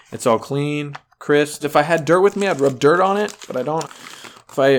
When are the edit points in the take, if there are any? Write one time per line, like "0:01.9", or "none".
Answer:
0:01.6
0:03.8

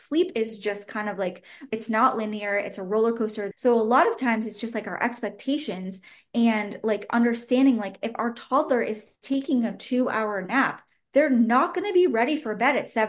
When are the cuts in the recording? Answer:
0:01.7
0:03.5

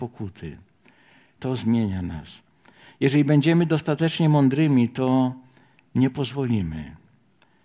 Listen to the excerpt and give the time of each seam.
0:01.4

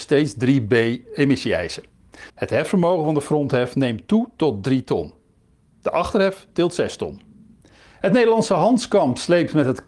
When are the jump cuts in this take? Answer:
0:02.3

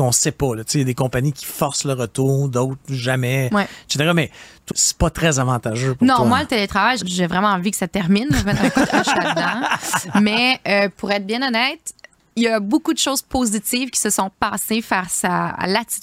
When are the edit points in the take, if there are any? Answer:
0:04.7
0:07.0

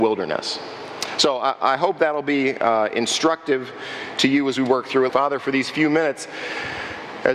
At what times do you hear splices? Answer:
0:05.1

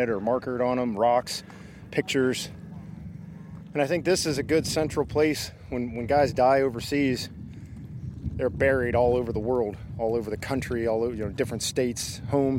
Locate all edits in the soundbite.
none

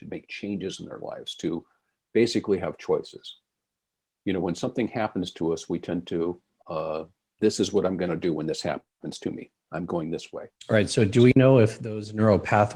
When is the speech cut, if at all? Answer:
0:07.4
0:10.5

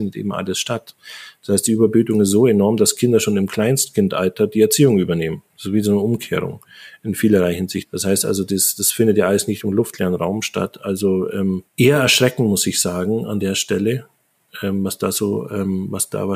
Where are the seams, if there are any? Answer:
0:07.8
0:11.7

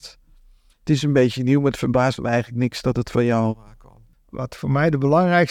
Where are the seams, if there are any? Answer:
0:04.1

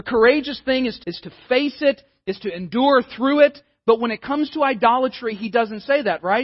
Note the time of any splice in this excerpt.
0:01.0

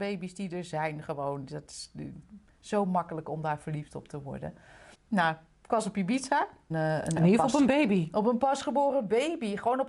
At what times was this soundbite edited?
0:04.9
0:06.7

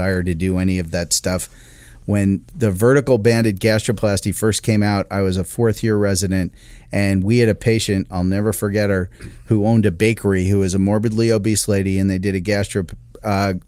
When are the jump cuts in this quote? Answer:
none

